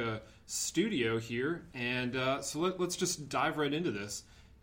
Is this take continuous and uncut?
yes; 0 cuts

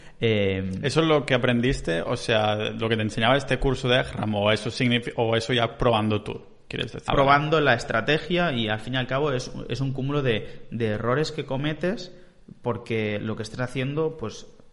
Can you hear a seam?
yes; 1 cut; at 7.1 s

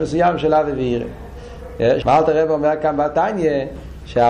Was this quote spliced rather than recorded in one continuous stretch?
yes; 1 cut; at 2.0 s

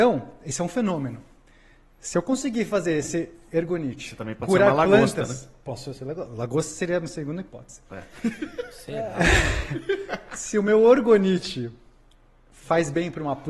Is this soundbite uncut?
yes; 0 cuts

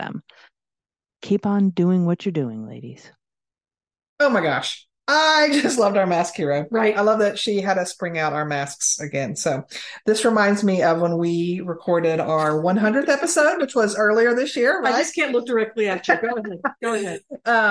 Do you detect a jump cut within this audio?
no; 0 cuts

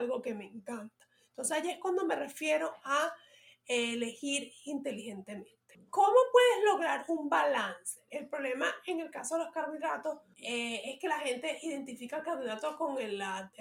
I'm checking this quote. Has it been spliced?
yes; 1 cut; at 8.1 s

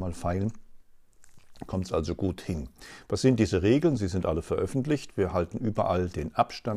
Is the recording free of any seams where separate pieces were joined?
yes; 0 cuts

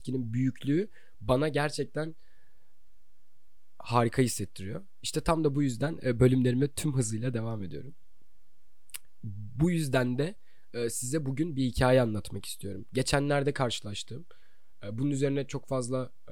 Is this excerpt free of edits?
yes; 0 cuts

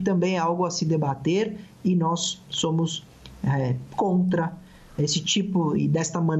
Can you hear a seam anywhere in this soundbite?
no; 0 cuts

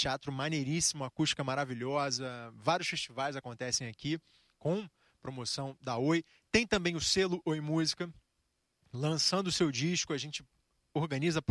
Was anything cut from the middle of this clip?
no; 0 cuts

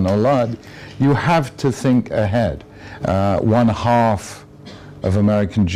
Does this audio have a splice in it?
yes; 1 cut; at 3.0 s

